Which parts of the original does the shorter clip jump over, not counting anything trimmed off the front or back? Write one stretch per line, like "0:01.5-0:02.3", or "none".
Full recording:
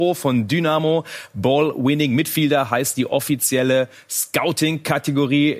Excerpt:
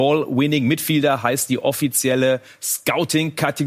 none